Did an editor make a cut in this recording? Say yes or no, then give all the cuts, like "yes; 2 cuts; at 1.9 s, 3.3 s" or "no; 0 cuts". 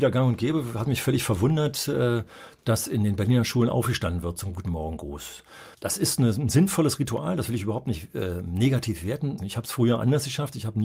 yes; 2 cuts; at 5.7 s, 9.4 s